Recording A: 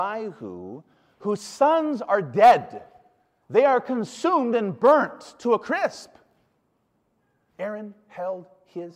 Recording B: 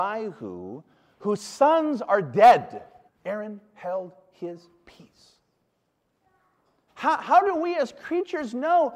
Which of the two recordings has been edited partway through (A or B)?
B